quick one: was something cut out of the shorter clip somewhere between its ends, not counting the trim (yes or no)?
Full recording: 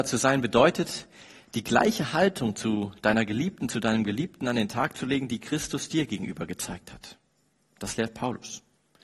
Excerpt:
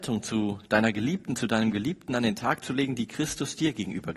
no